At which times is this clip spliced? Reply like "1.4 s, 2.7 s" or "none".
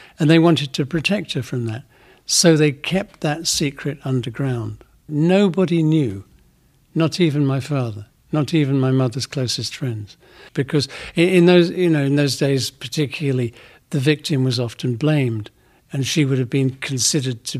5.1 s, 10.5 s